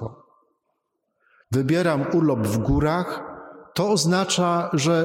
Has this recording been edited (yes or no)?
yes